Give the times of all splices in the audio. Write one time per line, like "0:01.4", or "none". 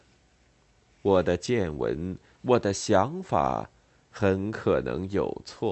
0:02.3